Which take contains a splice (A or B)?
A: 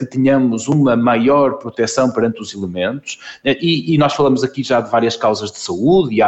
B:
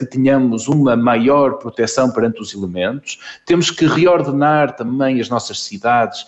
A